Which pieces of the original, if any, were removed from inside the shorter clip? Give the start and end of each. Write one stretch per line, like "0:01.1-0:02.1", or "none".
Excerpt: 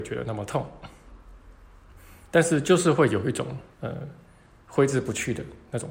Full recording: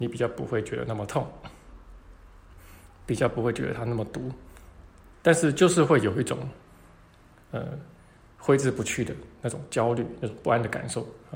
0:02.9-0:05.2
0:06.6-0:07.4